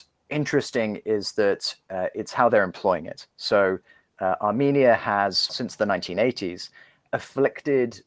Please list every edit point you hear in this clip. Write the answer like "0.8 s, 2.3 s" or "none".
5.5 s